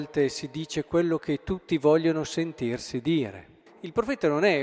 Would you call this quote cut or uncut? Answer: cut